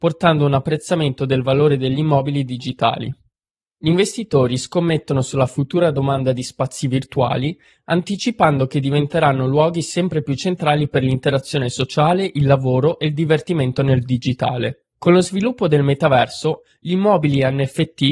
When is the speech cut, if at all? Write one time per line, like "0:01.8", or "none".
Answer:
0:14.9